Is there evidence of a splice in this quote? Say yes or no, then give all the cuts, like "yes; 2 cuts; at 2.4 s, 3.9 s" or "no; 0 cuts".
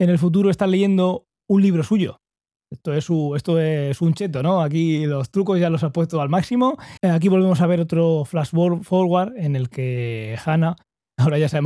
yes; 1 cut; at 7.0 s